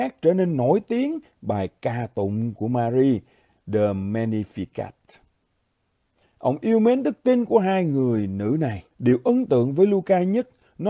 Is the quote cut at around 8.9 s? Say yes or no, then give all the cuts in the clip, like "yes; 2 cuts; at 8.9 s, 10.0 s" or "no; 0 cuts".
yes; 2 cuts; at 6.2 s, 8.9 s